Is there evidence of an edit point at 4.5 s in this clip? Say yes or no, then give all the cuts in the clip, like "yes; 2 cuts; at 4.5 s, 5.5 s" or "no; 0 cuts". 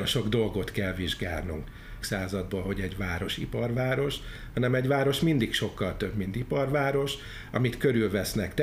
no; 1 cut; at 2.0 s